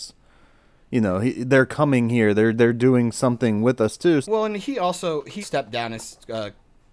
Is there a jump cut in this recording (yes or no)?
yes